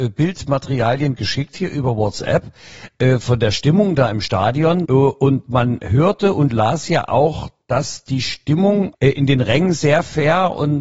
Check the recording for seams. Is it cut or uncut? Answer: cut